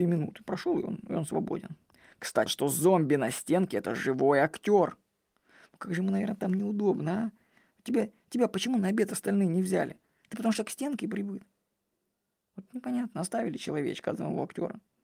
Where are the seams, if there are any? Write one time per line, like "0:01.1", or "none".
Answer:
0:02.5